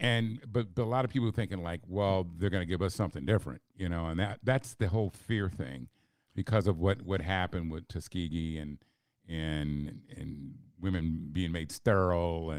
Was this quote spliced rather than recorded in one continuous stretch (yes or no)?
no